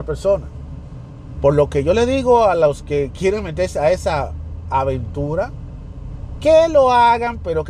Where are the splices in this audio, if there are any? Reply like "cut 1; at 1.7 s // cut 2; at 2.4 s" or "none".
cut 1; at 1.4 s

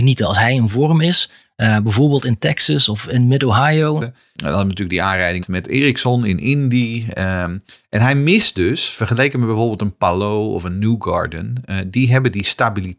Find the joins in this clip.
cut 1; at 4.0 s // cut 2; at 5.4 s

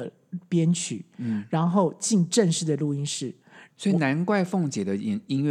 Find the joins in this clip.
cut 1; at 3.7 s

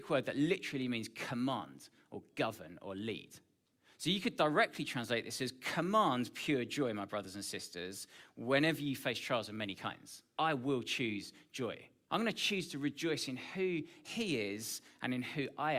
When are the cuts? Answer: cut 1; at 10.4 s // cut 2; at 12.1 s

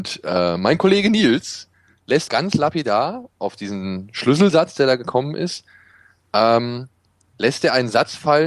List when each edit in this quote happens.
cut 1; at 2.3 s

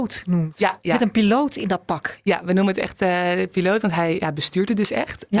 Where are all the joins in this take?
none

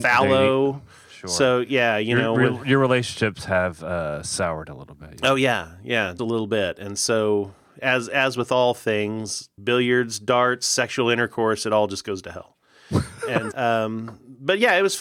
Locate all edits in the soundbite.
cut 1; at 6.2 s // cut 2; at 13.5 s

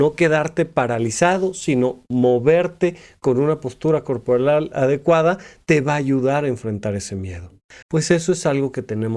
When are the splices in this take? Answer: cut 1; at 7.8 s

